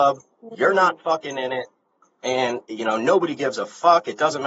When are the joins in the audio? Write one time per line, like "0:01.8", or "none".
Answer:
none